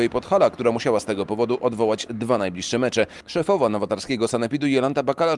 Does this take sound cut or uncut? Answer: uncut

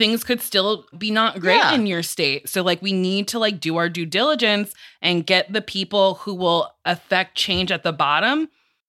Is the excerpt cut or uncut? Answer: cut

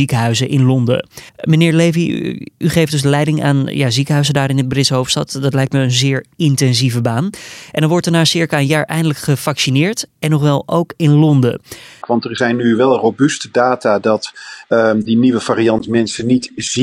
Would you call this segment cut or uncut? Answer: cut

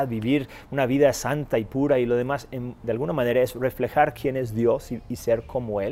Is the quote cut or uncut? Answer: cut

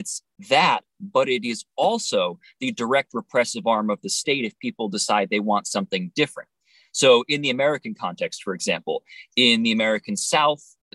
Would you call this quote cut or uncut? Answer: uncut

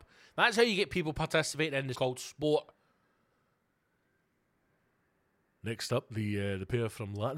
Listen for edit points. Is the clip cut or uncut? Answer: cut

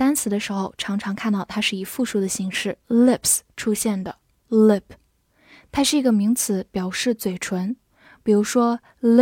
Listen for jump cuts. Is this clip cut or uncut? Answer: cut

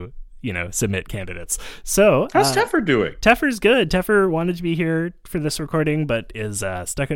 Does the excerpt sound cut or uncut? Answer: uncut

